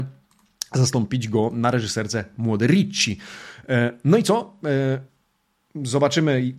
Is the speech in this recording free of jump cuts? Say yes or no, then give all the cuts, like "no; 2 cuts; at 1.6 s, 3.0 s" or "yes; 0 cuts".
yes; 0 cuts